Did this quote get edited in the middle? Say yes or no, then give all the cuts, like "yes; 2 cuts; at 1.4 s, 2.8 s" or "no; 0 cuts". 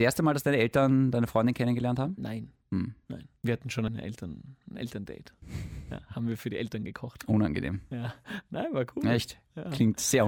no; 0 cuts